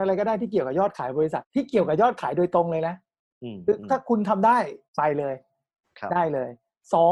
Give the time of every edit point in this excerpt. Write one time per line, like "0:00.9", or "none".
0:01.4
0:04.8